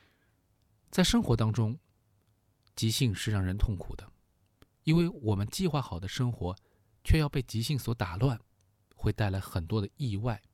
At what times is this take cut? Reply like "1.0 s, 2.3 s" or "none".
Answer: none